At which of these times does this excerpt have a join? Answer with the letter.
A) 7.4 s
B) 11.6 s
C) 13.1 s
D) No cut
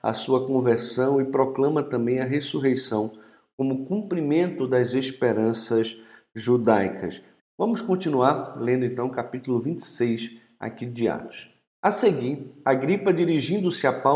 A